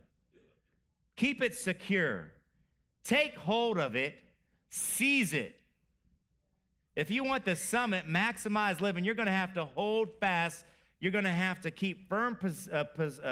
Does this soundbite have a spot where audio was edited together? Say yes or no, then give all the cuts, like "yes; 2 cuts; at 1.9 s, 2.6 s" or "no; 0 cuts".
no; 0 cuts